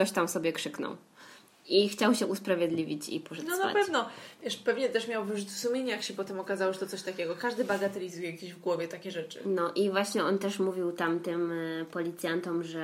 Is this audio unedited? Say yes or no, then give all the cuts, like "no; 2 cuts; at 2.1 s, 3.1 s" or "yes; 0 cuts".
yes; 0 cuts